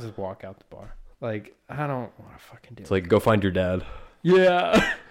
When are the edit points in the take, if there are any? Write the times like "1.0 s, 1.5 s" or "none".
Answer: 1.1 s